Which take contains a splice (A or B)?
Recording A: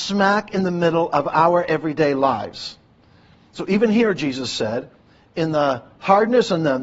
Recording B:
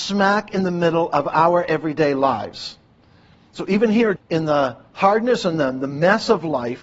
B